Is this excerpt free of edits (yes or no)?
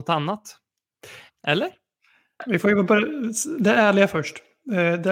no